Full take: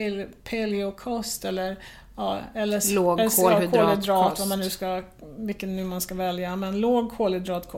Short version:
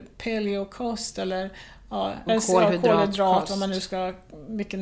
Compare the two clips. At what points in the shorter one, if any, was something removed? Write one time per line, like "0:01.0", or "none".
0:02.3